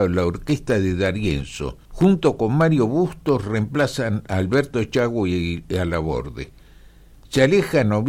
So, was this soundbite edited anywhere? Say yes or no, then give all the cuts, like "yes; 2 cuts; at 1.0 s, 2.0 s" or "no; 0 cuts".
yes; 1 cut; at 1.9 s